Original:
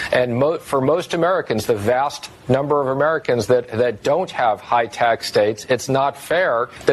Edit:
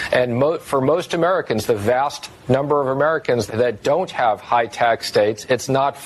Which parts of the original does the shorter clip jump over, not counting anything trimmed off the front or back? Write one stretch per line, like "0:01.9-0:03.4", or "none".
0:03.5-0:03.7